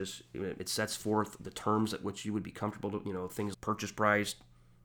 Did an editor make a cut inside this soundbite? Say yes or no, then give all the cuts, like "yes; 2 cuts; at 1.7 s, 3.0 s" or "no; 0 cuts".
yes; 1 cut; at 3.5 s